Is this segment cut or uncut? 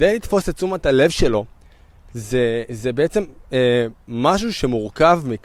uncut